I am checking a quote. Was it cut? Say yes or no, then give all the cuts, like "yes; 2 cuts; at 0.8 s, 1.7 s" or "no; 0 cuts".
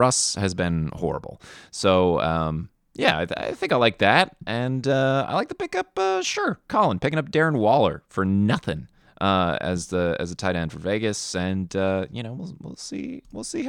no; 0 cuts